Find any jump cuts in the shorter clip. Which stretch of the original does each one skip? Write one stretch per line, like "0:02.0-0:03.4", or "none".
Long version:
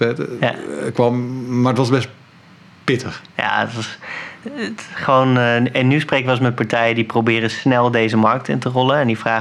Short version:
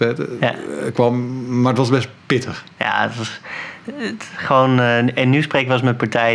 0:02.2-0:02.8